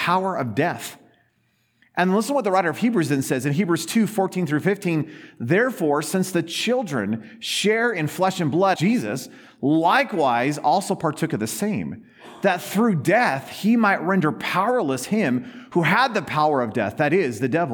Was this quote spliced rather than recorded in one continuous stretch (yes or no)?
yes